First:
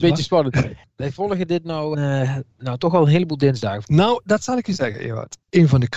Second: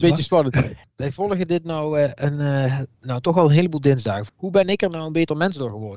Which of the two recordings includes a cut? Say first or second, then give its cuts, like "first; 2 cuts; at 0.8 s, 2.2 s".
first; 2 cuts; at 1.9 s, 3.8 s